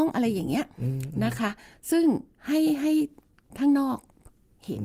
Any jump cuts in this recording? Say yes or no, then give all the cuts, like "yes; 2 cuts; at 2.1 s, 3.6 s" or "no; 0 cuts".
no; 0 cuts